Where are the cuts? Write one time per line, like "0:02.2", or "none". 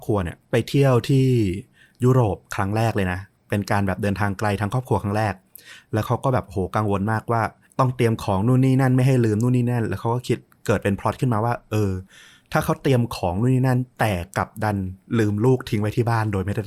0:13.9